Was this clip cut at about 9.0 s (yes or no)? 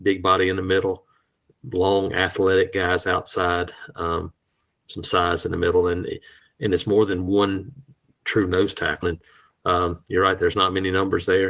yes